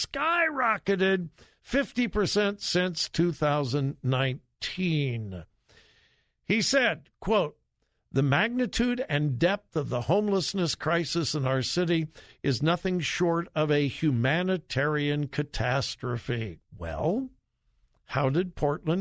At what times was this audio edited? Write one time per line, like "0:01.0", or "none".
0:16.6